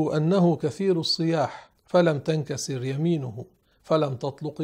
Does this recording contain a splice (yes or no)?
yes